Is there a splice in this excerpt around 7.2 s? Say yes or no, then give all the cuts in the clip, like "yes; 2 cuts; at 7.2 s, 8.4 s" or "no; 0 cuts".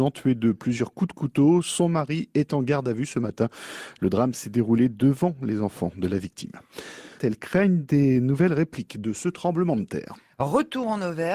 yes; 1 cut; at 7.2 s